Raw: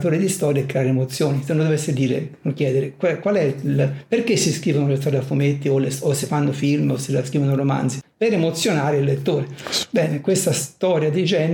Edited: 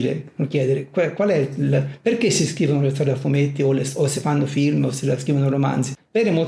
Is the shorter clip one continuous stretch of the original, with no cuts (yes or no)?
yes